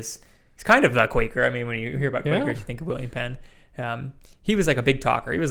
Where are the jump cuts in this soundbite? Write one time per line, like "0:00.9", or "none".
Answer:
none